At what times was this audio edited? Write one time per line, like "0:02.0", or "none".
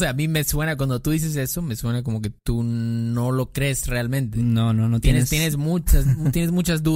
none

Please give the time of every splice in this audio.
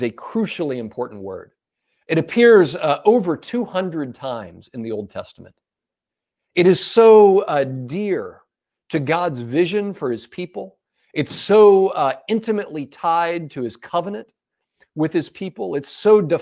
none

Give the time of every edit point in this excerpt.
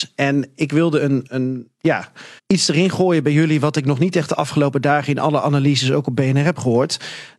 0:01.3
0:02.4

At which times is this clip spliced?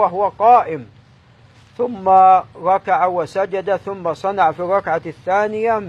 none

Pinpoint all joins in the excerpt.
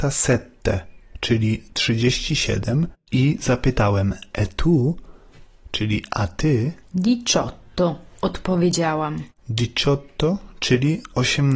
0:06.8

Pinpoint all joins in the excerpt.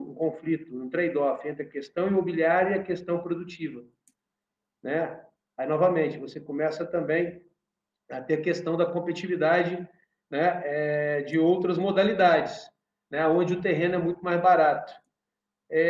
0:05.4

